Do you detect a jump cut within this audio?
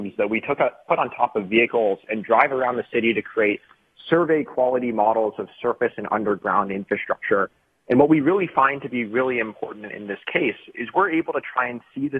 no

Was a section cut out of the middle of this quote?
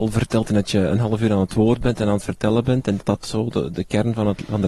yes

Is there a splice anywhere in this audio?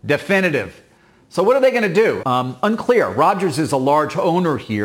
yes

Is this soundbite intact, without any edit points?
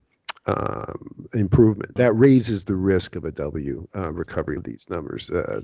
no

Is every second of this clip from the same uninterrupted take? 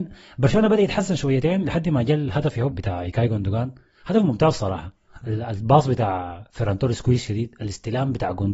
no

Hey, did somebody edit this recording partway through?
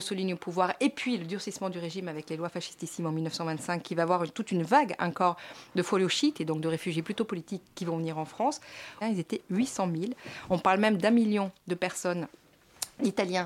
yes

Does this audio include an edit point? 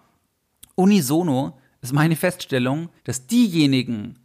yes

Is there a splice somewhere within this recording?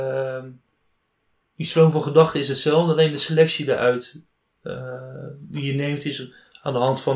no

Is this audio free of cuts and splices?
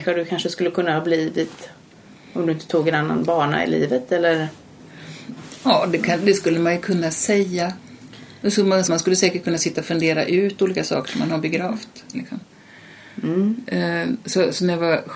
no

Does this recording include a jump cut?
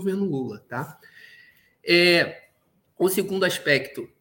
no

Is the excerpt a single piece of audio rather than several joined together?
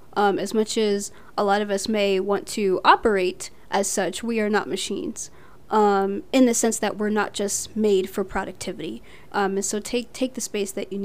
no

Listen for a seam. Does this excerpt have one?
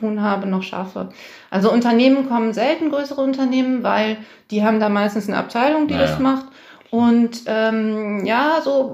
no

